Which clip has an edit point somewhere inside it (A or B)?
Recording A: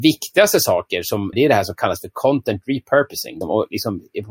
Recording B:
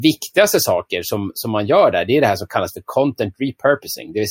A